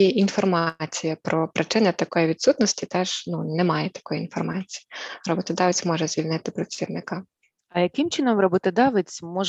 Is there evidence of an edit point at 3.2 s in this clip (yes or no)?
no